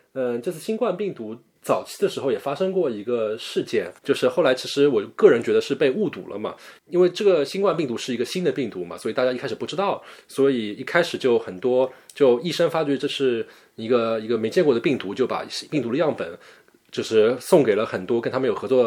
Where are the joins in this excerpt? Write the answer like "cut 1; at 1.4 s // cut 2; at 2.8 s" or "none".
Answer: cut 1; at 4.0 s

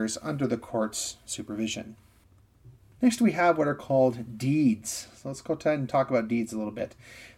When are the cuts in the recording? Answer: none

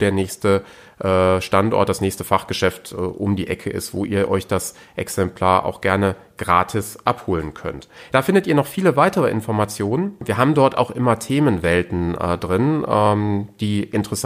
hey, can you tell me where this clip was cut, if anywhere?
none

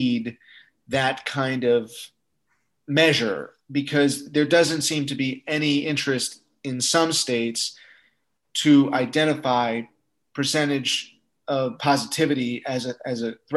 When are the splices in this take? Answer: none

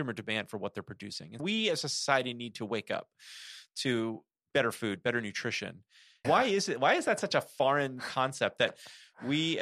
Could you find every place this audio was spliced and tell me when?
cut 1; at 1.4 s // cut 2; at 6.2 s

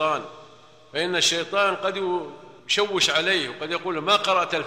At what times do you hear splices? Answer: cut 1; at 2.6 s

